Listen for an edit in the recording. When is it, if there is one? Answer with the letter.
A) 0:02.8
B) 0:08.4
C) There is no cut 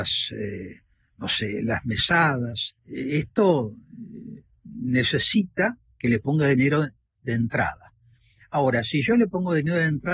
A